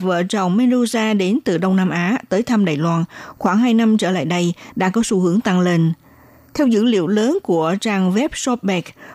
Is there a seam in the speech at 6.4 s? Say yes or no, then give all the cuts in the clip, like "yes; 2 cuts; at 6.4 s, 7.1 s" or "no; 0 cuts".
no; 0 cuts